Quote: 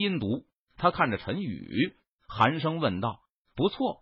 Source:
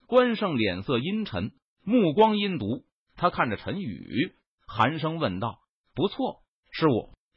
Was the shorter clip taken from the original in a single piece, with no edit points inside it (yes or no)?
yes